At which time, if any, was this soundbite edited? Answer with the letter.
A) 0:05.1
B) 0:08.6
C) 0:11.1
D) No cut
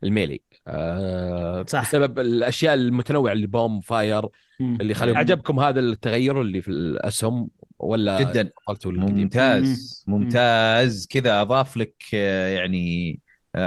A